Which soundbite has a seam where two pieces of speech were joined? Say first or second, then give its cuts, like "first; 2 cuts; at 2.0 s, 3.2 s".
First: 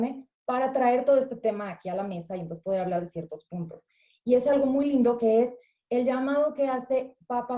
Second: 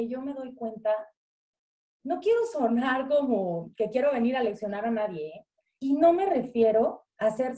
second; 1 cut; at 5.8 s